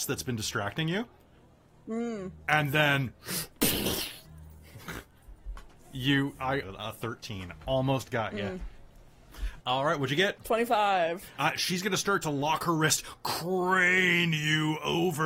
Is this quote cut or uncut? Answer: cut